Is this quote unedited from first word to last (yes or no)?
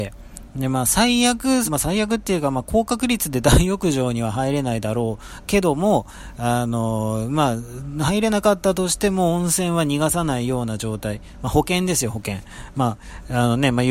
no